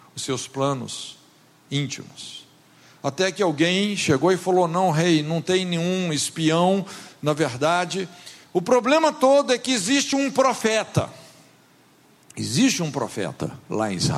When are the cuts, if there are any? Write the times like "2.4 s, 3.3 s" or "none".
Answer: none